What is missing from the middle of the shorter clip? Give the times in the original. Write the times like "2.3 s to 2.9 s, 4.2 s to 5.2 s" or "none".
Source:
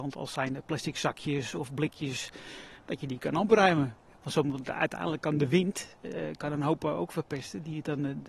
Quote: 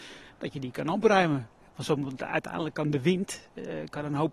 none